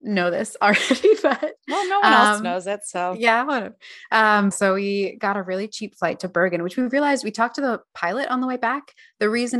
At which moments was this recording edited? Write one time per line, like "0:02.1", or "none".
0:04.5